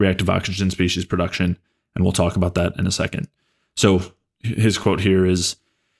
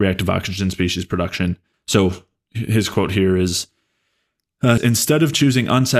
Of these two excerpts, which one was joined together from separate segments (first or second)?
second